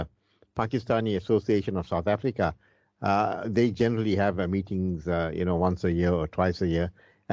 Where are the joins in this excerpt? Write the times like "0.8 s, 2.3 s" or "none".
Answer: none